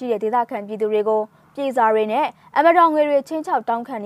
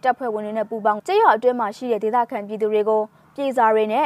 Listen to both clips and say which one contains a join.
second; 1 cut; at 1.0 s

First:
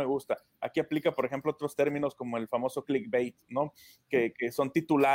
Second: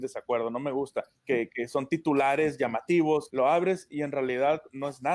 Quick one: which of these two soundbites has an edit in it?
second; 2 cuts; at 1.1 s, 3.3 s

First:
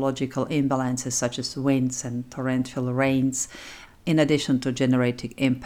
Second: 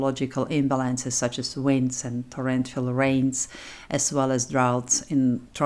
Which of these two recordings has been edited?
first; 1 cut; at 3.9 s

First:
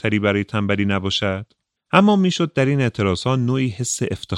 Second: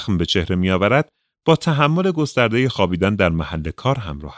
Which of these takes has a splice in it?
first; 1 cut; at 1.8 s

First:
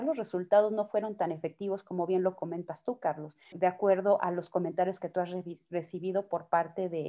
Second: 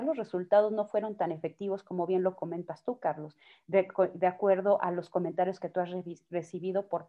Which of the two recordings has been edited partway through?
first; 1 cut; at 3.5 s

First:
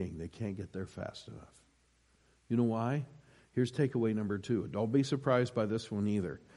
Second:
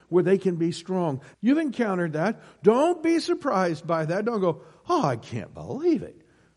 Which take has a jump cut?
second; 1 cut; at 1.3 s

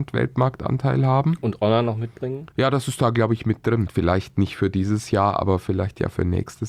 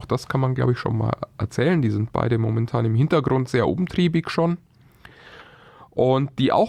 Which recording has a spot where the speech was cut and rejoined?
first; 2 cuts; at 2.5 s, 3.9 s

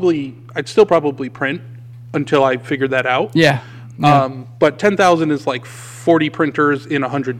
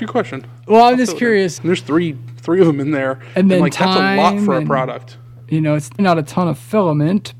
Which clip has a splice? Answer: second; 2 cuts; at 1.6 s, 6.0 s

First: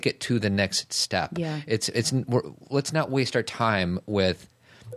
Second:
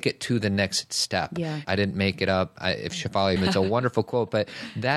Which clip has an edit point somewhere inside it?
second; 2 cuts; at 1.6 s, 3.4 s

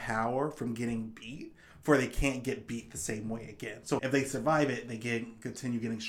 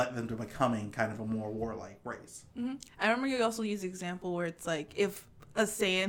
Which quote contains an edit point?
first; 1 cut; at 4.0 s

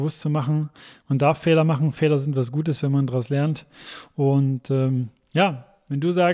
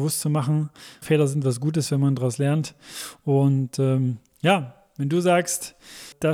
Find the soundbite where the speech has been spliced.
second; 1 cut; at 1.0 s

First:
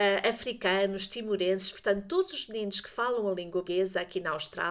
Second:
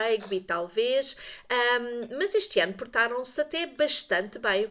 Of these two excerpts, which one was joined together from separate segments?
first; 1 cut; at 3.6 s

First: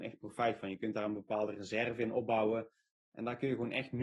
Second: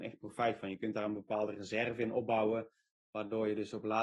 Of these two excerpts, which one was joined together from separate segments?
first; 1 cut; at 3.0 s

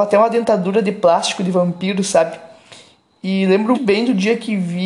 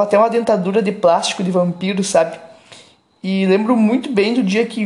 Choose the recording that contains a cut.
first; 1 cut; at 3.7 s

